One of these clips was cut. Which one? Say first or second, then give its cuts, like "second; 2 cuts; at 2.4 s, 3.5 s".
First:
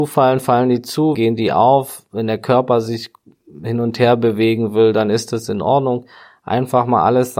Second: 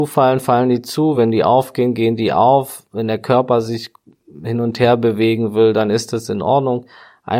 first; 1 cut; at 1.1 s